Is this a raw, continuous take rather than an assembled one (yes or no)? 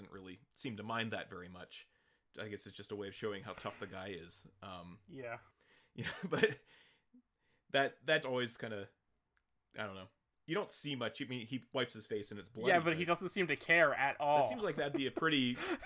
no